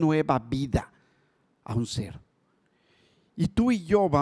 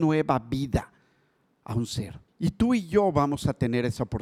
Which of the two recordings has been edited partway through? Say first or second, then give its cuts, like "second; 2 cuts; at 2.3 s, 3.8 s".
second; 1 cut; at 2.3 s